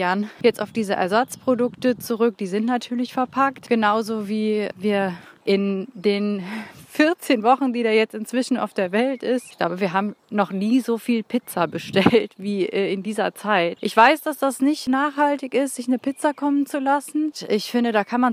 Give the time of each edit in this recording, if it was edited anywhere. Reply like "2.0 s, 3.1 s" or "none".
10.2 s, 13.8 s